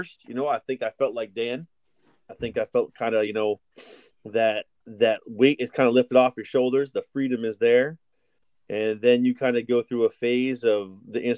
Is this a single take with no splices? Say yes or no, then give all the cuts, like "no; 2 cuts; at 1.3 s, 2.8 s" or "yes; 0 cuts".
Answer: yes; 0 cuts